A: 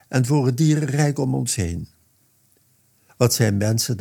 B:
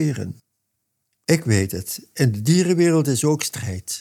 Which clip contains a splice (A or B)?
A